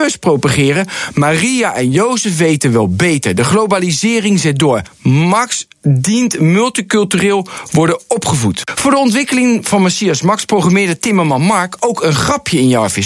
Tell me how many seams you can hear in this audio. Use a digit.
0